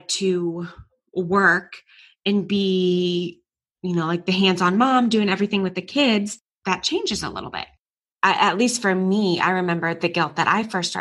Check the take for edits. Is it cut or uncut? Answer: cut